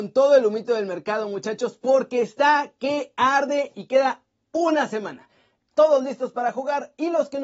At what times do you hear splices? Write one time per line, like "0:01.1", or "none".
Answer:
0:05.6